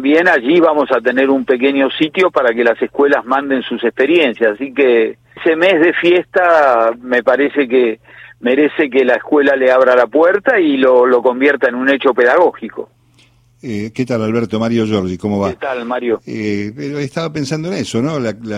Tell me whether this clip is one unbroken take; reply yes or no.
no